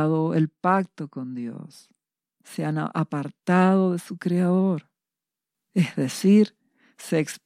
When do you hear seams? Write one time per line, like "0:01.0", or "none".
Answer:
0:05.5

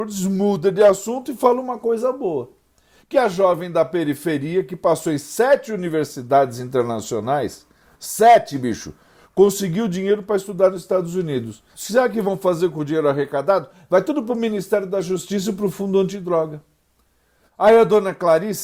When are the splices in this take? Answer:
0:11.7

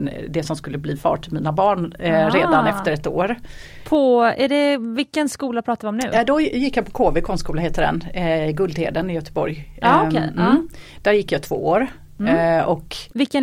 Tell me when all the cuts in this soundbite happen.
none

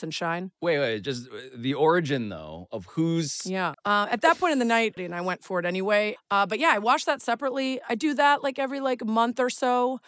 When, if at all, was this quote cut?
0:03.7
0:05.0
0:06.2

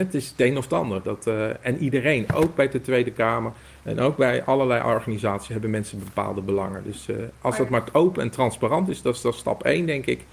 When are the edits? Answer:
none

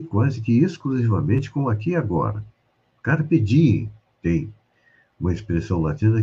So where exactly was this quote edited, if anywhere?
none

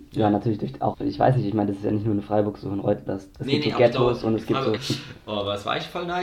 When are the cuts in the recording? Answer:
0:00.9
0:03.1
0:04.8

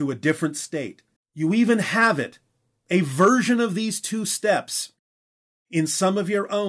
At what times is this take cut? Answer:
0:01.2

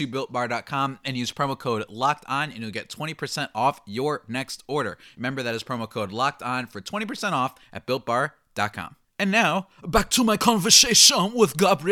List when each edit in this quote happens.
none

